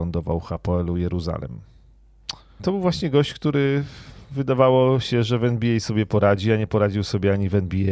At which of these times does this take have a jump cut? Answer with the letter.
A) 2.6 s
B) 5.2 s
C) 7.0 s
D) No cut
A